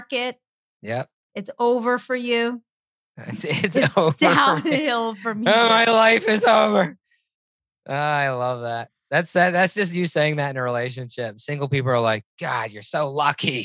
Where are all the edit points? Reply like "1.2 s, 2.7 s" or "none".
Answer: none